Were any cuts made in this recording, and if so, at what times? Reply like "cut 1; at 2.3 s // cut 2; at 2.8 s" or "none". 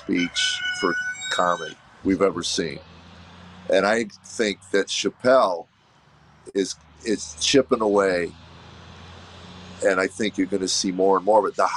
cut 1; at 2.0 s

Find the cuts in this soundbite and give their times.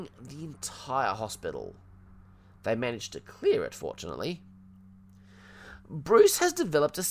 none

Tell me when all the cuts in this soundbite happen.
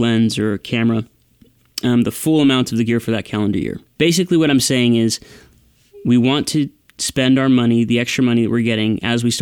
cut 1; at 4.0 s

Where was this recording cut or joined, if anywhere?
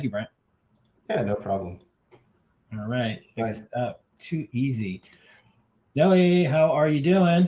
none

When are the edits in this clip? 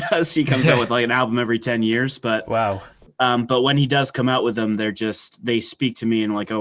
none

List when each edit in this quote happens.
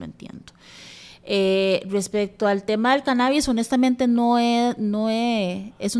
none

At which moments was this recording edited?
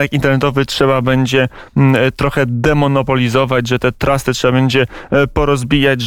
none

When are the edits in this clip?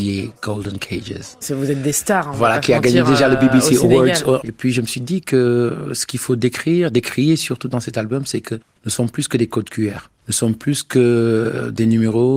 cut 1; at 1.4 s // cut 2; at 4.4 s

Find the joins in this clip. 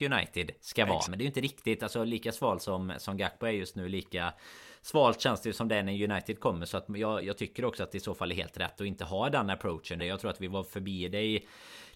cut 1; at 1.1 s // cut 2; at 10.0 s

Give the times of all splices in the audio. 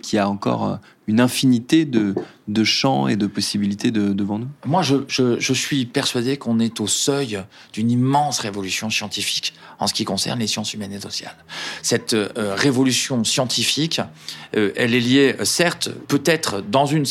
none

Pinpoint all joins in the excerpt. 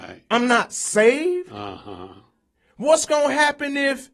none

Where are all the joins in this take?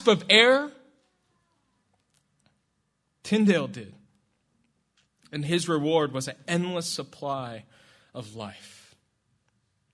none

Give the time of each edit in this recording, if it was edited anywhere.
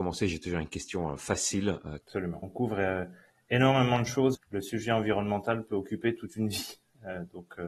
cut 1; at 2.0 s // cut 2; at 4.3 s

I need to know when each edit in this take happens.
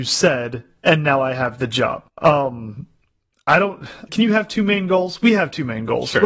cut 1; at 2.1 s // cut 2; at 4.1 s

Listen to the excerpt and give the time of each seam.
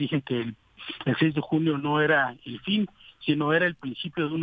none

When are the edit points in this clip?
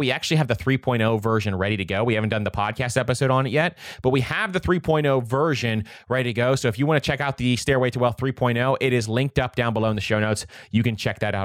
none

